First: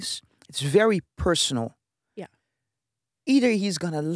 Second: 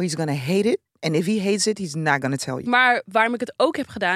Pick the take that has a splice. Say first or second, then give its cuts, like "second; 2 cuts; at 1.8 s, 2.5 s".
second; 1 cut; at 2.6 s